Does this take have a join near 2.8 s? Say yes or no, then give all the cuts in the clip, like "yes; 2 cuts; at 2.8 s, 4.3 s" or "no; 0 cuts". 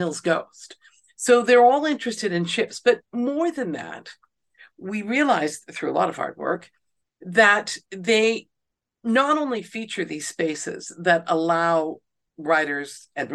no; 0 cuts